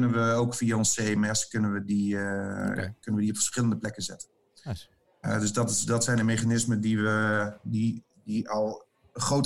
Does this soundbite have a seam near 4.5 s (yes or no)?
no